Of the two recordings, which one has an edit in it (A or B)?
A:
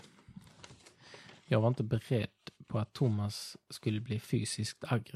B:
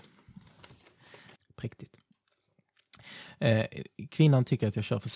B